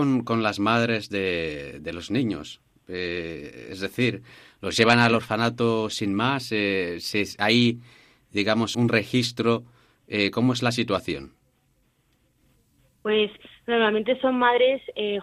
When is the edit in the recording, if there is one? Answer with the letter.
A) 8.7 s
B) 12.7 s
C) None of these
A